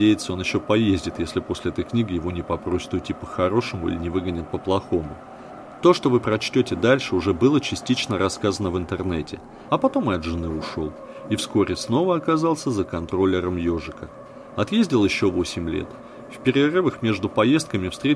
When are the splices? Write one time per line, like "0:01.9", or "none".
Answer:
0:09.7